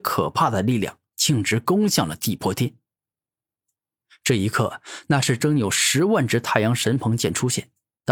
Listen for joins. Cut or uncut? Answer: cut